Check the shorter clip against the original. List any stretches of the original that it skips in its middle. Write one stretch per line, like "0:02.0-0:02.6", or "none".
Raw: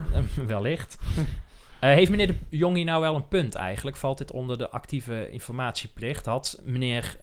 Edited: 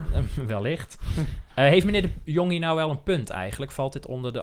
0:01.5-0:01.8